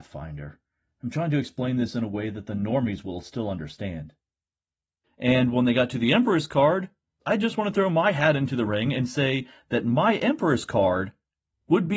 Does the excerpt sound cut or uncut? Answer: cut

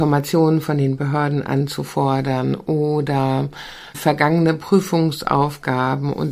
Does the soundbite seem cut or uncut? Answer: cut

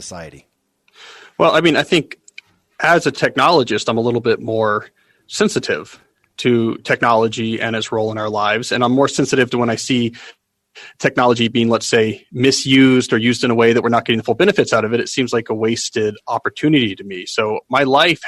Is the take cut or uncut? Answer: uncut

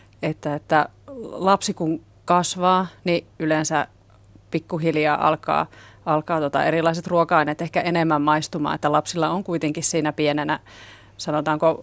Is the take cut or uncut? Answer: uncut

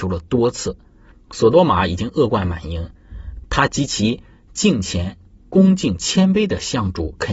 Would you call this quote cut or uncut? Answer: cut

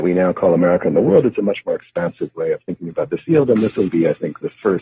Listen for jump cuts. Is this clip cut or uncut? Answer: cut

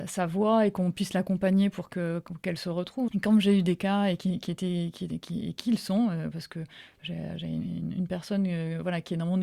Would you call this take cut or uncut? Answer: cut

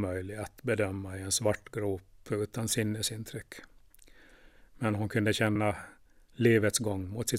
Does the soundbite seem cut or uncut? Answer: uncut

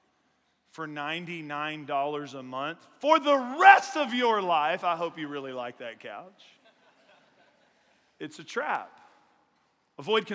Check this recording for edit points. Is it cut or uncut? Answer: uncut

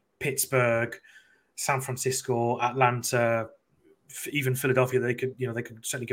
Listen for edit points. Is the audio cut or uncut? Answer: uncut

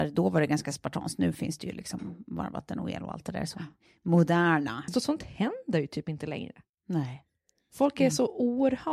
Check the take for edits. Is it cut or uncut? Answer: cut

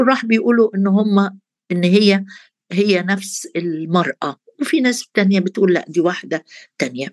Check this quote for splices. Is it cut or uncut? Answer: uncut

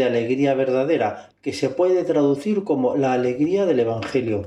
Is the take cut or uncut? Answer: cut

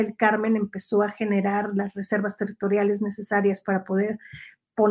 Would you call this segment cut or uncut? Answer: uncut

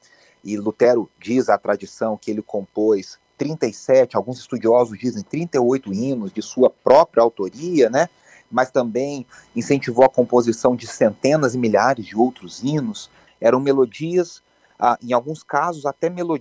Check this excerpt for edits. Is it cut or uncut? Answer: cut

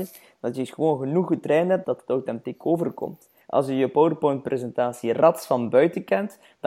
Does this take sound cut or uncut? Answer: cut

